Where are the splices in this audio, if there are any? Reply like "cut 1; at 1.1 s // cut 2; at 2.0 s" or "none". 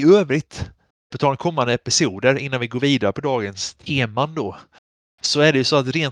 cut 1; at 1.1 s

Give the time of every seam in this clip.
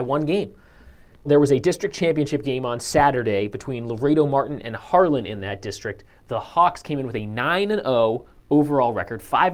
cut 1; at 1.2 s

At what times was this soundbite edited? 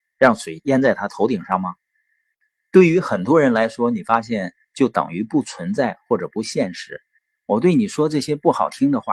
cut 1; at 4.6 s // cut 2; at 7.2 s

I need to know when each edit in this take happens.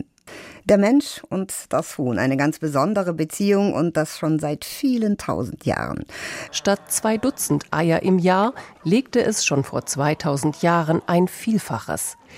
cut 1; at 6.5 s // cut 2; at 8.8 s

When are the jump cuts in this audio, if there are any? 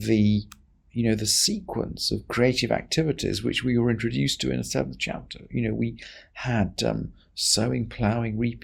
none

